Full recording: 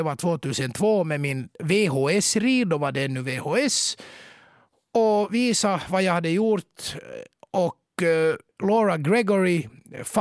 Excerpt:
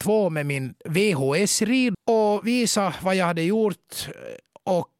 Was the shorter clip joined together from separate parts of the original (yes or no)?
yes